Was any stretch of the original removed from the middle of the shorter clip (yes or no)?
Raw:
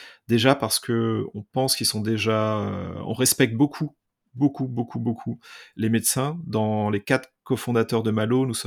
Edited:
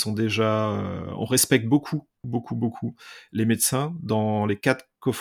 yes